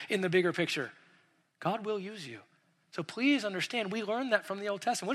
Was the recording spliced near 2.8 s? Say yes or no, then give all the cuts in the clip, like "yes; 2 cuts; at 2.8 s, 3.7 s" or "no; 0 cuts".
no; 0 cuts